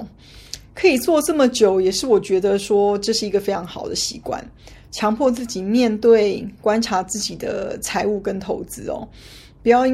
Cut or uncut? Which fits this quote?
uncut